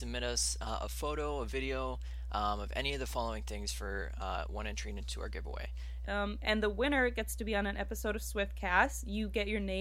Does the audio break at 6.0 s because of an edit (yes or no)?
yes